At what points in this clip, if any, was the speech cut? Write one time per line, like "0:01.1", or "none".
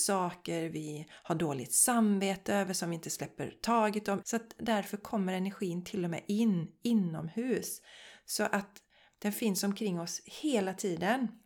0:04.2